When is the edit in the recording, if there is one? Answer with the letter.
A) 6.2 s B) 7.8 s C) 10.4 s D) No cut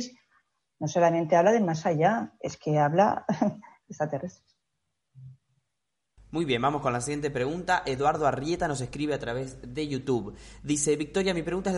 D